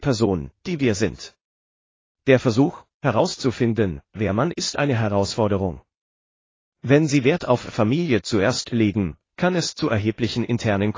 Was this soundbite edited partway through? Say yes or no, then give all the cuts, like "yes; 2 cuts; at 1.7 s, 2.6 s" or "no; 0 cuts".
yes; 3 cuts; at 4.5 s, 6.6 s, 9.3 s